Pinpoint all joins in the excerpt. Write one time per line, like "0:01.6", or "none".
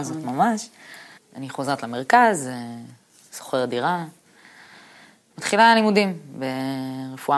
0:01.2

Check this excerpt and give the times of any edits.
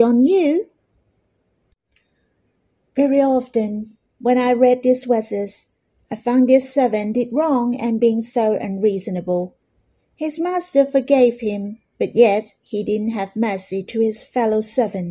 none

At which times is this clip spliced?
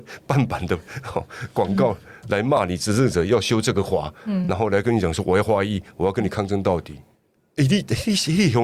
none

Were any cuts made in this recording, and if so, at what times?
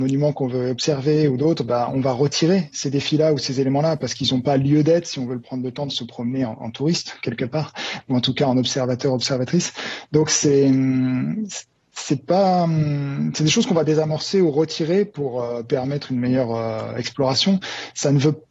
none

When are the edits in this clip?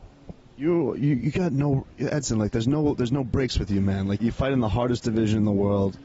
0:04.2

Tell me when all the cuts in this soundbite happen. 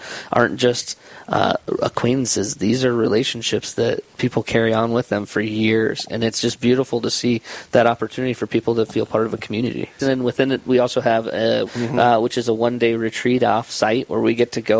0:10.0
0:11.7

